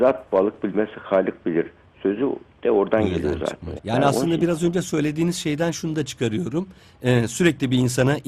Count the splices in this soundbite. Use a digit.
1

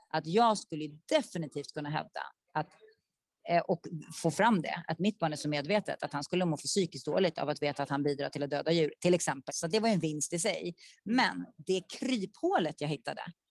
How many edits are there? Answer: 1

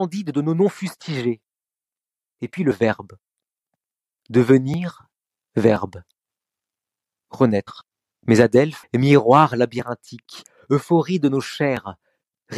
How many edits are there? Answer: 1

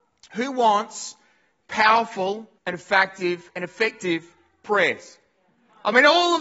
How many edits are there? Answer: 1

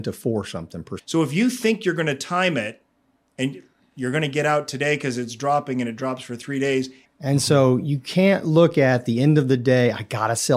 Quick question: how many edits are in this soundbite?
2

